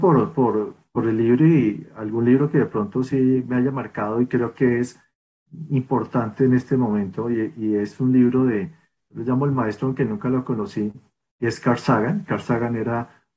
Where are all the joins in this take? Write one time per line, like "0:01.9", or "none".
none